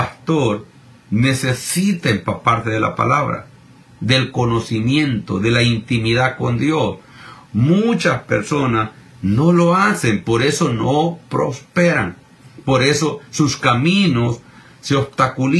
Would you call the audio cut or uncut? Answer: cut